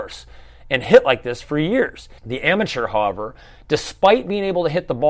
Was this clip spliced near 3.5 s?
no; 1 cut; at 2.2 s

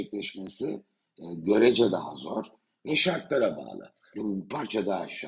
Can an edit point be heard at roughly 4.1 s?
yes; 1 cut; at 4.1 s

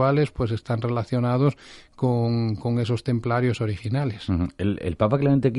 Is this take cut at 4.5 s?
no; 0 cuts

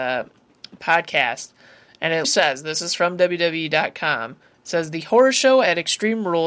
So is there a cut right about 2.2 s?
yes; 1 cut; at 2.2 s

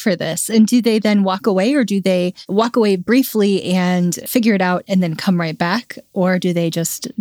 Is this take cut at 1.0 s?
no; 0 cuts

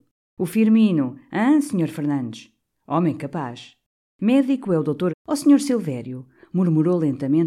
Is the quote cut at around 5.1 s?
yes; 1 cut; at 5.1 s

